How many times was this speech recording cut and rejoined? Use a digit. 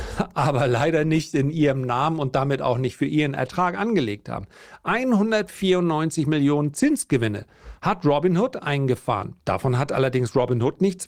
1